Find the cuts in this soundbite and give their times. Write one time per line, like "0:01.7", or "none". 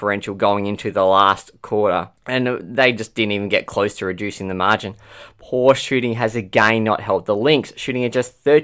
0:02.2

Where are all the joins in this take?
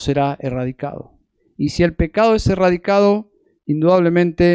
none

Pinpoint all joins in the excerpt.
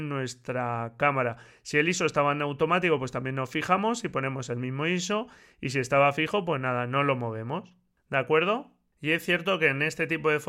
none

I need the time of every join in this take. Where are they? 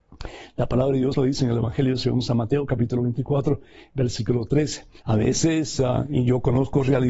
0:01.1
0:05.0

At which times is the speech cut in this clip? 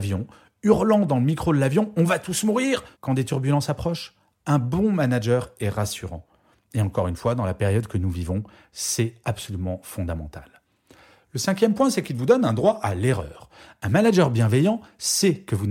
0:02.9

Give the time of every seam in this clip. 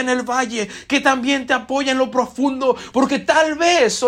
0:02.9

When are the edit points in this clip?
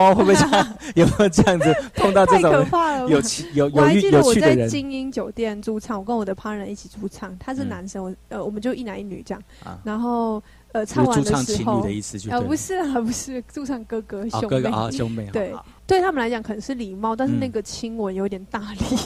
0:15.8

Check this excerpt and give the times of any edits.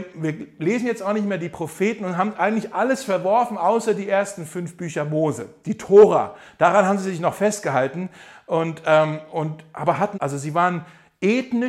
0:10.1

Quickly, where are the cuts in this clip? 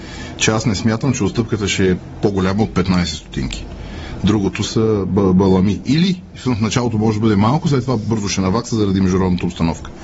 none

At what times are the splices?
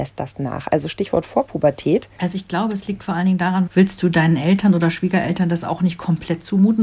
0:02.2
0:03.7

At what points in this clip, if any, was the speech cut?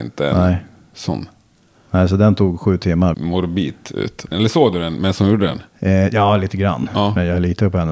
0:03.1
0:04.3

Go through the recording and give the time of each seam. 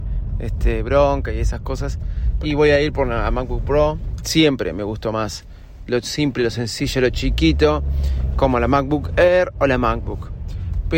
0:02.4
0:04.2

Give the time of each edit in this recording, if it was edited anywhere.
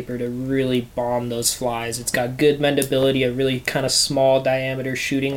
none

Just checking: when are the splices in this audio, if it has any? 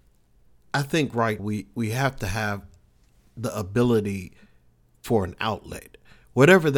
0:01.4

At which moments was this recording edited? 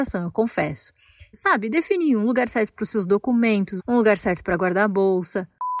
0:01.3
0:03.8

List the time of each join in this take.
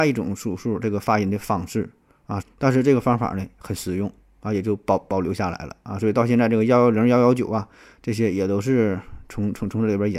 0:02.4

